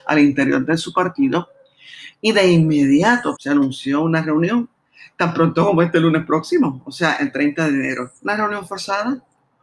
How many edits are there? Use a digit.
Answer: 2